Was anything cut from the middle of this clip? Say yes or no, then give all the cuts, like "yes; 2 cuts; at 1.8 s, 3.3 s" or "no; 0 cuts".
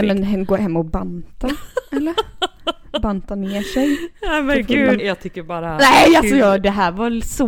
yes; 1 cut; at 5.0 s